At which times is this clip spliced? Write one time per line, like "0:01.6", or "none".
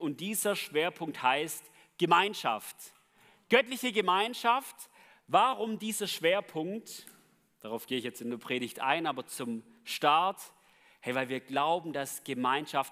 none

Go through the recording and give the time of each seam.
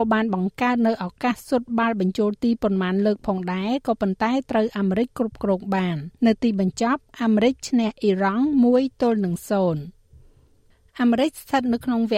0:06.2

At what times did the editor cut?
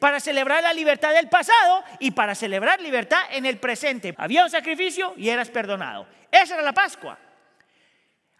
0:04.1

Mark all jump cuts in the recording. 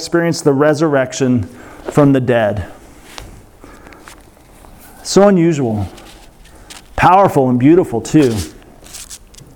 none

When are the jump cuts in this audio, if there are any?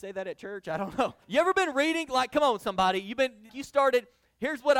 0:01.2
0:03.5

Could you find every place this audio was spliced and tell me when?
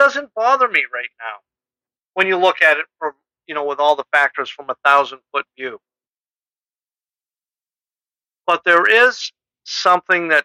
none

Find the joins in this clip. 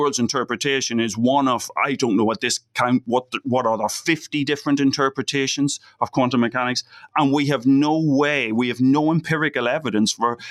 none

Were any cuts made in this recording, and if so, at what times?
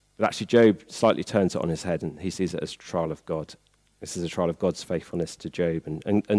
none

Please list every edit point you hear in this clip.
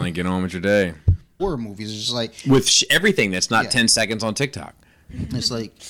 0:01.4

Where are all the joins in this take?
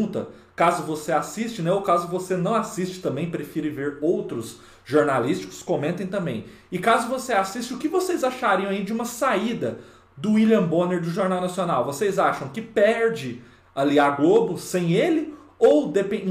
none

